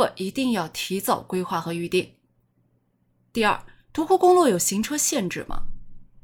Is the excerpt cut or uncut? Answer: uncut